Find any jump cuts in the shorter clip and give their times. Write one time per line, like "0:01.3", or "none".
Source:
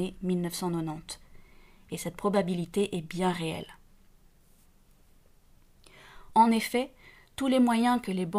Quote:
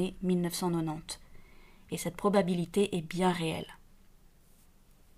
none